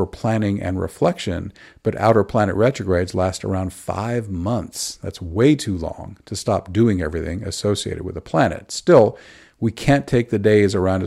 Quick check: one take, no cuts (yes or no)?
yes